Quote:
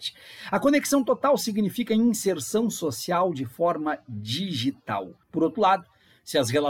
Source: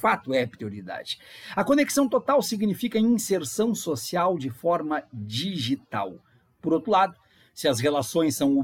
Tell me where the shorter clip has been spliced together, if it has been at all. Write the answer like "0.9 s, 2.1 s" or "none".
5.2 s